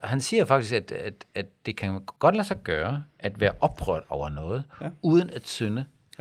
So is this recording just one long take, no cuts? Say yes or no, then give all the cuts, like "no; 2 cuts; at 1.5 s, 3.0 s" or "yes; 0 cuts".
no; 1 cut; at 2.2 s